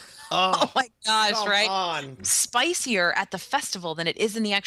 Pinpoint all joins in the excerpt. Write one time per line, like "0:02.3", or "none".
0:02.2